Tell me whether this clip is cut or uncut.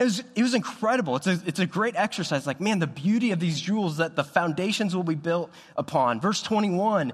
uncut